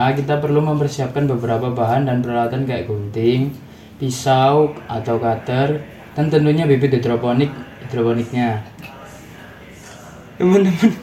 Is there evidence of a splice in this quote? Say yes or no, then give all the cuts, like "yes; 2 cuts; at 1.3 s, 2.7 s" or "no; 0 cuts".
no; 0 cuts